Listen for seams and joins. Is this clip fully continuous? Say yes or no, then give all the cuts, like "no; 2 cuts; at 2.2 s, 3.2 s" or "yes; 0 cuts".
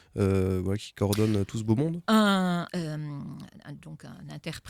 no; 1 cut; at 2.7 s